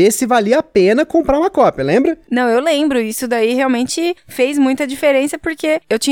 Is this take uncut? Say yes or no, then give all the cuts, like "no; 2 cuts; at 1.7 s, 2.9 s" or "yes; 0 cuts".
yes; 0 cuts